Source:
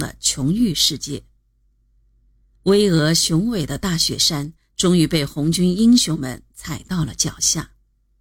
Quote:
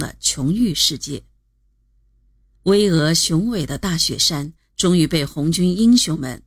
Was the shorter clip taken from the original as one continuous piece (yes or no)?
yes